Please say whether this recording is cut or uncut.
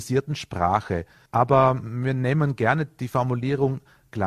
cut